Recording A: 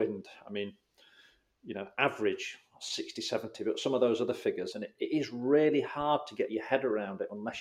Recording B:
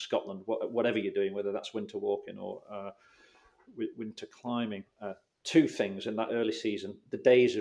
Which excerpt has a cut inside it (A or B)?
A